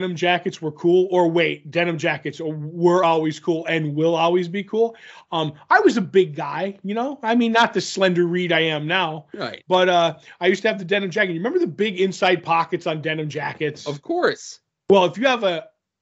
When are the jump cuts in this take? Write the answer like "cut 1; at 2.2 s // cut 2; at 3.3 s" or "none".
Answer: none